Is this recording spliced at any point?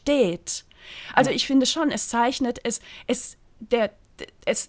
no; 0 cuts

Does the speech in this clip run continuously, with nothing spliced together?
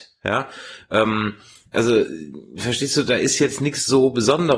yes; 0 cuts

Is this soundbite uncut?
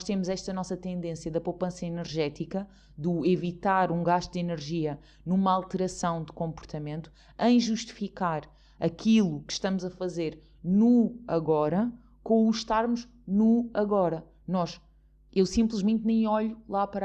yes; 0 cuts

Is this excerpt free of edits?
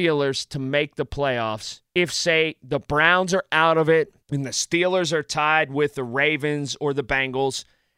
no; 2 cuts; at 1.9 s, 4.2 s

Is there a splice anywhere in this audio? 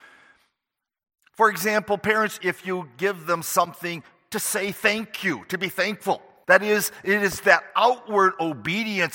yes; 2 cuts; at 2.4 s, 6.4 s

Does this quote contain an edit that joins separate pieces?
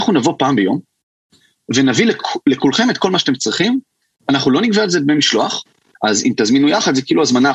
yes; 1 cut; at 5.9 s

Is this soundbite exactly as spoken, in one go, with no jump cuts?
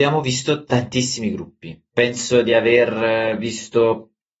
yes; 0 cuts

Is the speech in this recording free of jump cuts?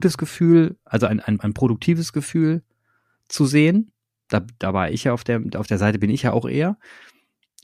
no; 1 cut; at 1.4 s

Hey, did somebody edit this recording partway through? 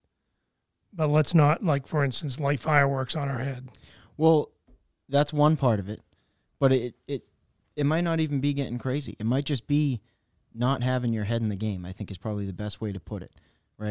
no; 0 cuts

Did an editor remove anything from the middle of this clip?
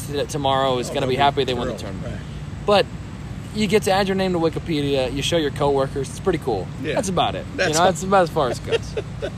no; 0 cuts

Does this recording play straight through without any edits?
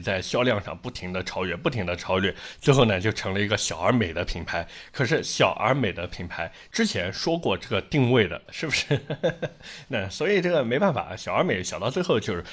no; 1 cut; at 8.5 s

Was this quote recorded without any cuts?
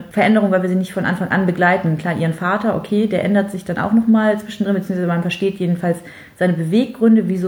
yes; 0 cuts

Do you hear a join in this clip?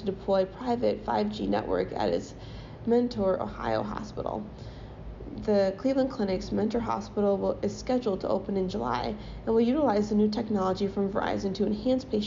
no; 0 cuts

